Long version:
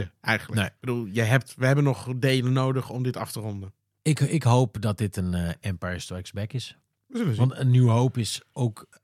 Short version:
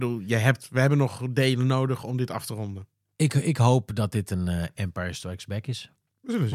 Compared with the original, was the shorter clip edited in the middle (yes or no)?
no